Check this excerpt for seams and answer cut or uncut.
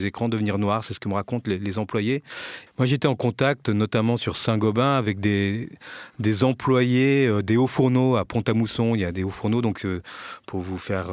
cut